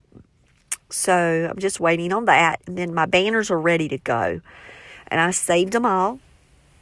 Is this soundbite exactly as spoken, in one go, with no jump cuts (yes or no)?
yes